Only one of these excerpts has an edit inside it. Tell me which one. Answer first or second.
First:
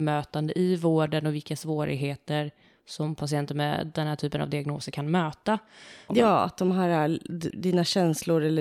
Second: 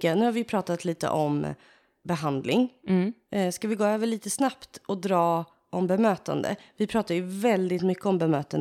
first